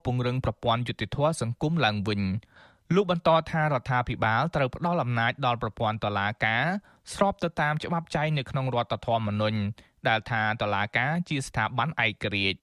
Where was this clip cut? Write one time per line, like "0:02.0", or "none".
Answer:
none

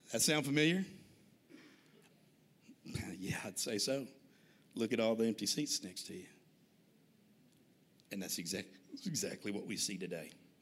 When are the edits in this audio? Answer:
0:02.1
0:08.0

